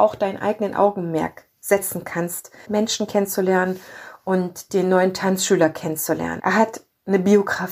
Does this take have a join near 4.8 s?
no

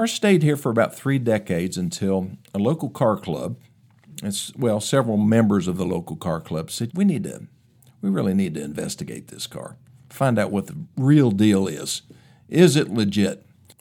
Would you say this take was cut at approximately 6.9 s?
yes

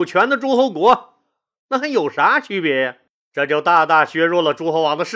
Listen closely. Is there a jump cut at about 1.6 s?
yes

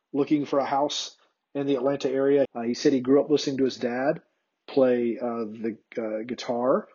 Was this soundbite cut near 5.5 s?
no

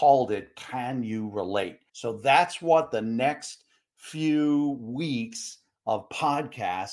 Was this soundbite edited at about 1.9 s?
yes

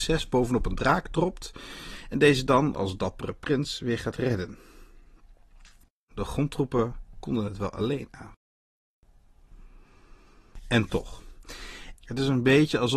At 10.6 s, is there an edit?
no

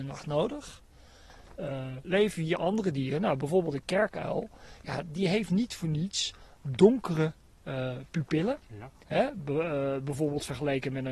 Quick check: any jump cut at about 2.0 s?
yes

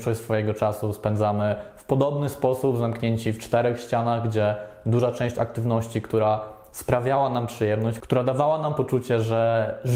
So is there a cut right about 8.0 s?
yes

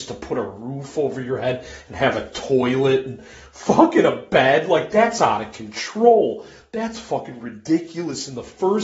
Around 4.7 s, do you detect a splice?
no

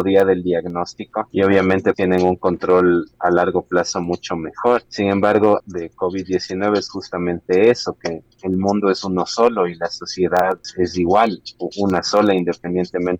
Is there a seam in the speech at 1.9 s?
yes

